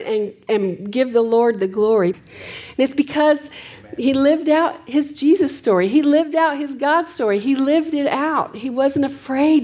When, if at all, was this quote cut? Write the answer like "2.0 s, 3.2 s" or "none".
2.1 s